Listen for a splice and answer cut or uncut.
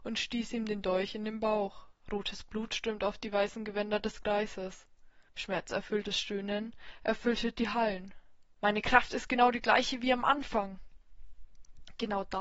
cut